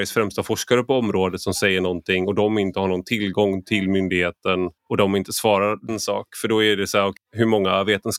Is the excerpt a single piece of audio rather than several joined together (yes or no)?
no